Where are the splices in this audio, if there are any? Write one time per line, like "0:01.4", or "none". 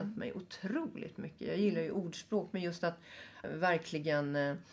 0:03.4